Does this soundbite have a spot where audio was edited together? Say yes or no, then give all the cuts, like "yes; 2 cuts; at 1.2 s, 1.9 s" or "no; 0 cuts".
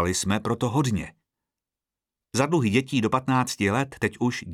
no; 0 cuts